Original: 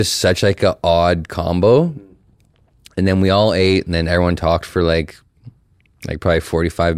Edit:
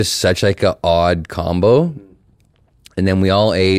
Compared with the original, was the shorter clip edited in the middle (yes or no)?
no